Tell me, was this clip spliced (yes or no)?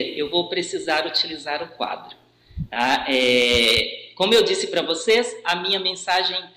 no